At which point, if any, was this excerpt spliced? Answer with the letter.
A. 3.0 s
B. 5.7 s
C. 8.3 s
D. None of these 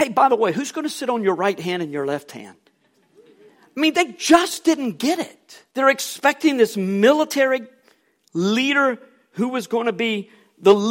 B